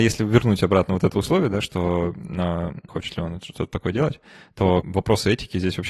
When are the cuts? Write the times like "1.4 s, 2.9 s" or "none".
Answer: 2.9 s, 4.8 s